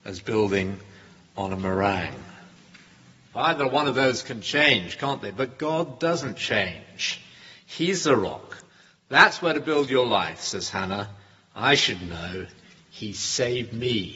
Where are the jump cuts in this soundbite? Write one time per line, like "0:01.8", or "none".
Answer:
0:03.3